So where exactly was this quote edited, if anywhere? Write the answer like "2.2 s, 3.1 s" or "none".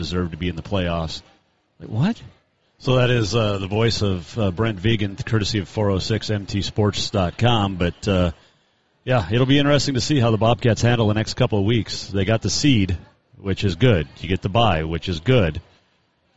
2.6 s

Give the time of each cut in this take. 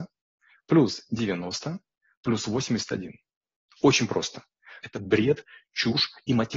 4.8 s

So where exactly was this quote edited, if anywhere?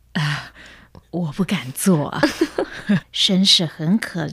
1.0 s, 3.0 s

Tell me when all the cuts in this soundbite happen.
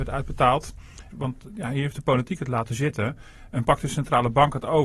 1.1 s

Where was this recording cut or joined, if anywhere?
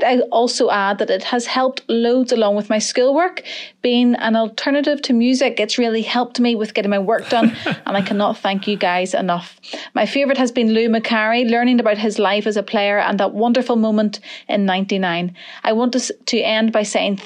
none

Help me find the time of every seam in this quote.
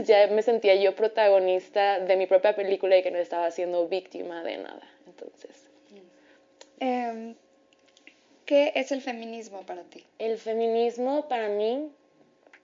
6.8 s, 10.1 s

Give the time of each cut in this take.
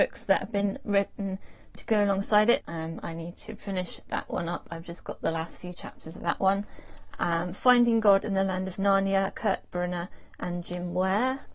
2.6 s

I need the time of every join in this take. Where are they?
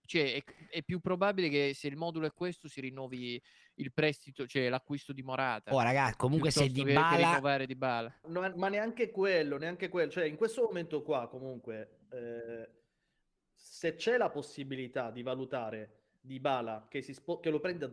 8.2 s

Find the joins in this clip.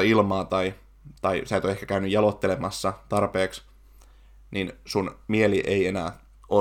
none

